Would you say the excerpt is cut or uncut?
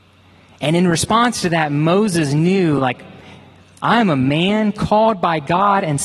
uncut